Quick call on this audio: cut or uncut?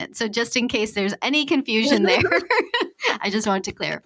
uncut